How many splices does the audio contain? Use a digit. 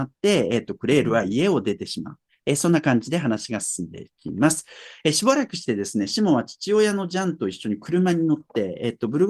0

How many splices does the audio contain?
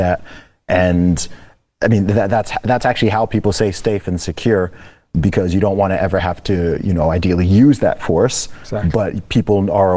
0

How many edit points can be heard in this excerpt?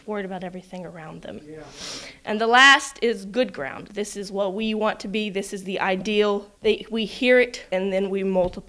2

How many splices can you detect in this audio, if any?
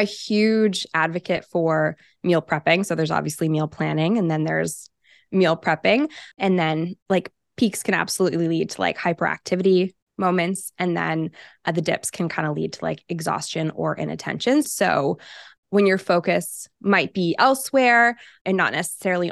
2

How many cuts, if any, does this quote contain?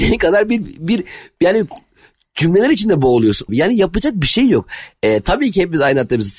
1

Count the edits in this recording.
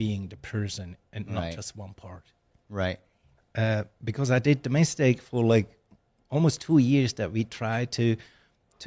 1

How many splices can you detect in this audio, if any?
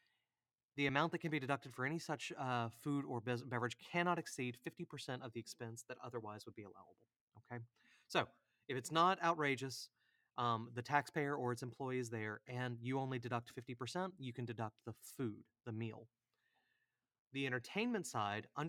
0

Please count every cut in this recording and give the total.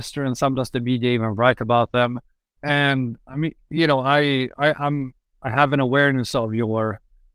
1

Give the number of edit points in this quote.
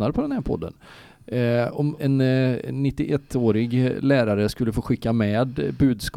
1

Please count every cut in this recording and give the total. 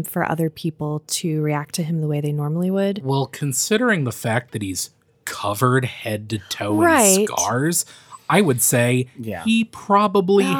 0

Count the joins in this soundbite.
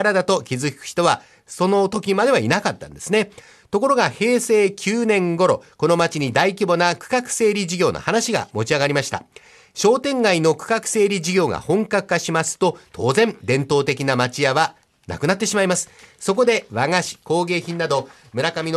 1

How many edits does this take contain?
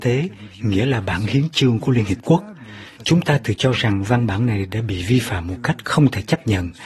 0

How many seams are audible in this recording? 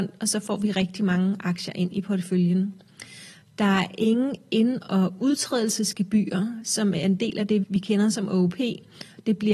1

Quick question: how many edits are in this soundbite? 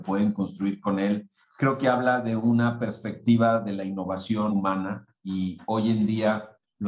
2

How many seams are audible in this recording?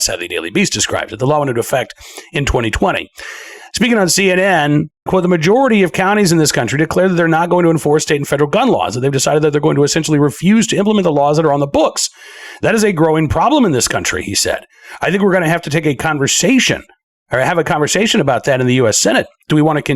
1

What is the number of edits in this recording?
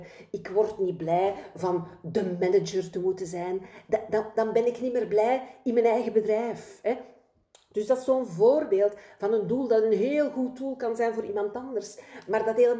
0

